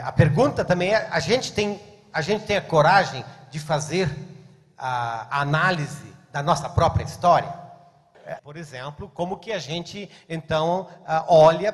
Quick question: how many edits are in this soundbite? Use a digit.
1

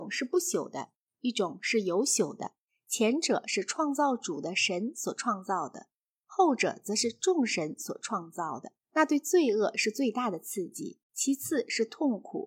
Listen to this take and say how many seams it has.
2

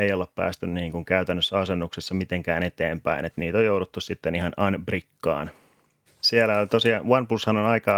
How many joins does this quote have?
1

